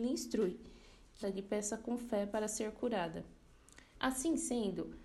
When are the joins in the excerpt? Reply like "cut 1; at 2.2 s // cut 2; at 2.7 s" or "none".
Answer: cut 1; at 1.2 s // cut 2; at 3.9 s